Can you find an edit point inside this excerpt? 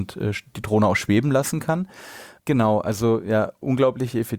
yes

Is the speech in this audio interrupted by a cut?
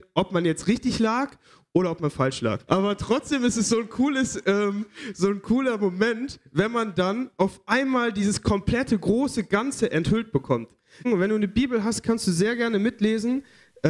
yes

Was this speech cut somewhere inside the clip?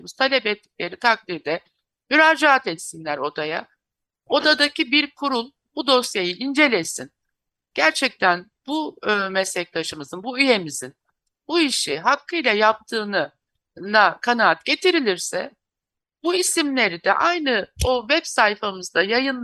no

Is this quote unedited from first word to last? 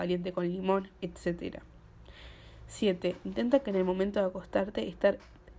no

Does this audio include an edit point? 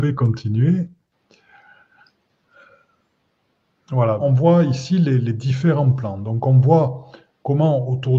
yes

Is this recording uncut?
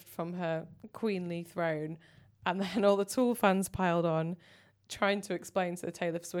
yes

